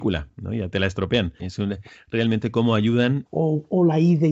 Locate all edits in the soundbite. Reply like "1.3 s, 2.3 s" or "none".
1.4 s, 3.3 s